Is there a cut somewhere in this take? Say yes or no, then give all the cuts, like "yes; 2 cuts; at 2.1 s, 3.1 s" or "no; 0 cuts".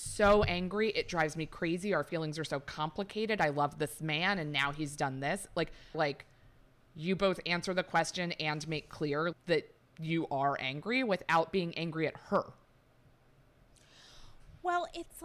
yes; 2 cuts; at 5.9 s, 9.3 s